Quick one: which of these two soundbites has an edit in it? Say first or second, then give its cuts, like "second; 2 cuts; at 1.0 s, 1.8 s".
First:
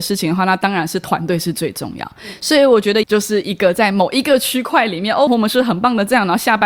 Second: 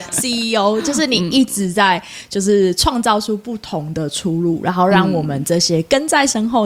first; 2 cuts; at 3.0 s, 5.3 s